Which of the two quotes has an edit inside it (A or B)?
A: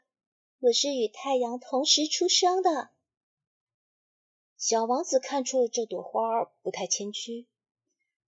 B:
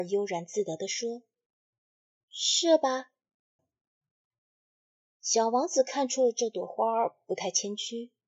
B